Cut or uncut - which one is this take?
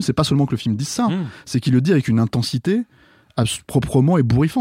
uncut